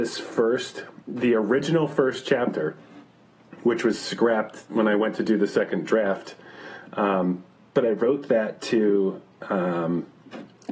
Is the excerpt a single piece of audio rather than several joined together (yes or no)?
yes